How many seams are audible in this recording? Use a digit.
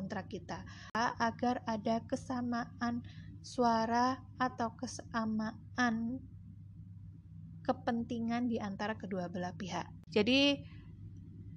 1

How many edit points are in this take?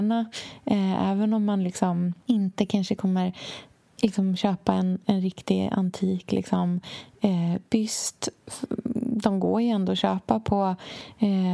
1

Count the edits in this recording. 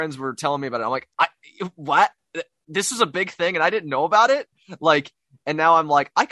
1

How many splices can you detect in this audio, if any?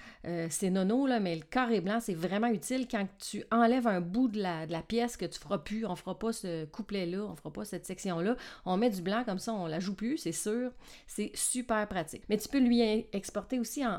1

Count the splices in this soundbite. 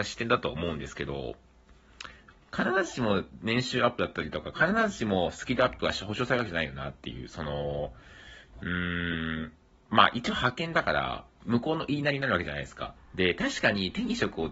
2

